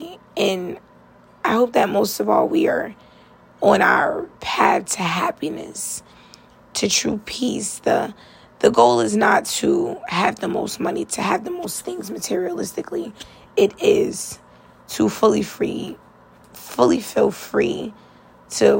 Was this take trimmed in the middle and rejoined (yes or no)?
no